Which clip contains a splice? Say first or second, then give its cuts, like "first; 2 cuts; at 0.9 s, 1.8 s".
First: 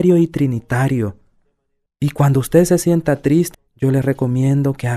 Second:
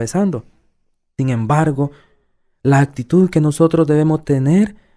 first; 2 cuts; at 1.9 s, 3.5 s